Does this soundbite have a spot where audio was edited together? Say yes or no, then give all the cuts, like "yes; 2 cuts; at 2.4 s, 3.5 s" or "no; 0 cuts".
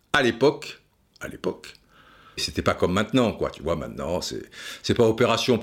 yes; 1 cut; at 2.4 s